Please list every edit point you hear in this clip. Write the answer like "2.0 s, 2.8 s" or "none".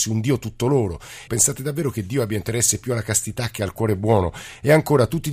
1.3 s

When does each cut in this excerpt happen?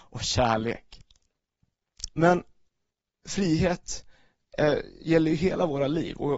2.1 s

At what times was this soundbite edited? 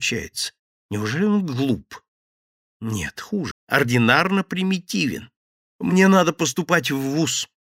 3.5 s, 5.7 s

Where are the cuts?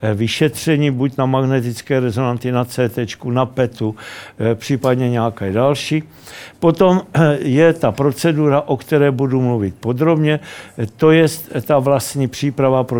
none

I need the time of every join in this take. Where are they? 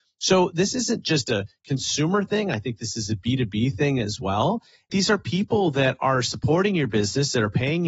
4.9 s

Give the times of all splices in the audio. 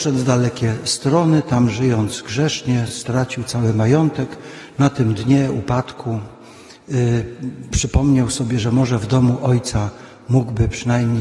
none

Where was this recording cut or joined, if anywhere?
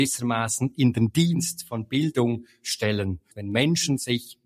3.3 s

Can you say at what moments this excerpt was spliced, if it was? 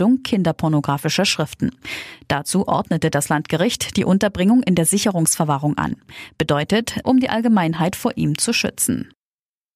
7.0 s

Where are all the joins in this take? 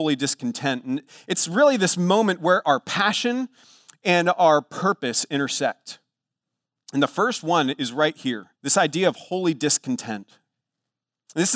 6.8 s, 8.5 s

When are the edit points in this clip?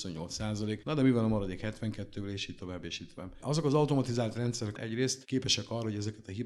4.8 s

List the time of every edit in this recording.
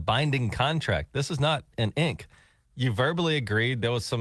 none

